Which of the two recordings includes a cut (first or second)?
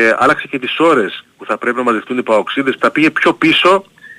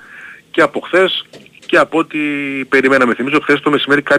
first